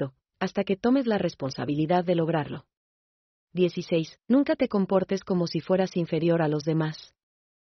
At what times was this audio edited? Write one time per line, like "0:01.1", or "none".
none